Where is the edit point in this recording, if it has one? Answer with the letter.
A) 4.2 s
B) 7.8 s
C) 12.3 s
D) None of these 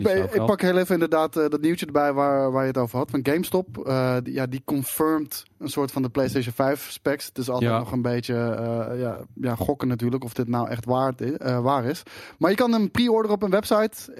A